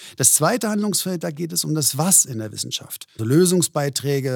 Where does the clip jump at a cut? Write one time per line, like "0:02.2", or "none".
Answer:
0:03.2